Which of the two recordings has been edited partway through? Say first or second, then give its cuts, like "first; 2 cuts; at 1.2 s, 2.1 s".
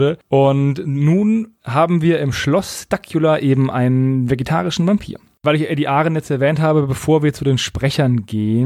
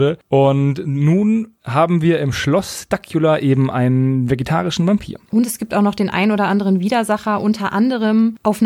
second; 1 cut; at 5.3 s